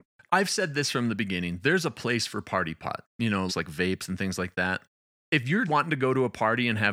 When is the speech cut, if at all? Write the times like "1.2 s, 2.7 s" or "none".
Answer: 3.5 s, 5.6 s